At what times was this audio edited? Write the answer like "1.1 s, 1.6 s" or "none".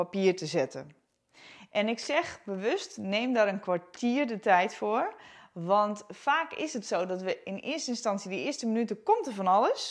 none